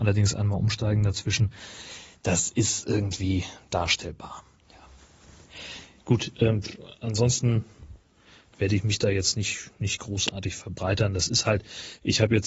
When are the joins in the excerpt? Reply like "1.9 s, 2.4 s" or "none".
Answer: none